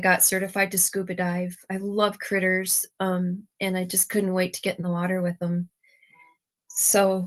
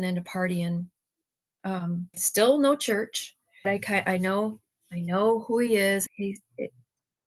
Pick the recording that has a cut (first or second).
second